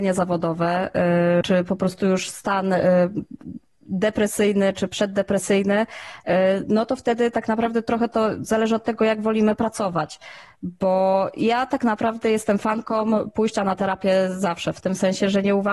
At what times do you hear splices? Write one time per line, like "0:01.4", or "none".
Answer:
0:01.4